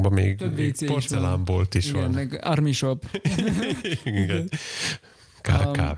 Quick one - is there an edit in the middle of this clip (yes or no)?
no